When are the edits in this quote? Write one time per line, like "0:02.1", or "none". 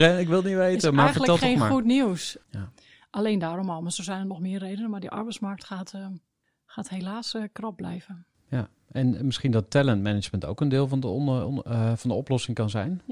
0:02.4